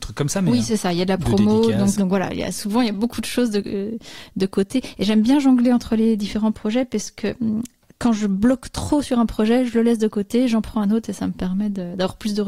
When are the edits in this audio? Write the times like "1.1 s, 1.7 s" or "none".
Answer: 2.0 s